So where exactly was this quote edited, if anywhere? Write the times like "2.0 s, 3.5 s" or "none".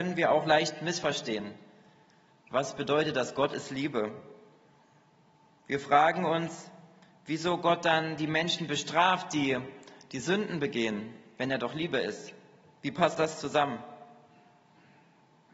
none